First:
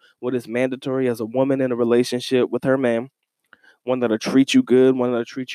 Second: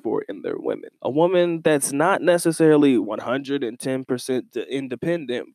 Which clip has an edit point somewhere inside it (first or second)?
second